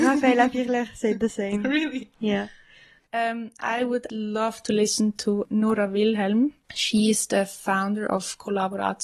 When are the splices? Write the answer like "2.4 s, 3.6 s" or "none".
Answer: 3.0 s, 6.6 s